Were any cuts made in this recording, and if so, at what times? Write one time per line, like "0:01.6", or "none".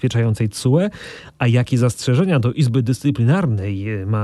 none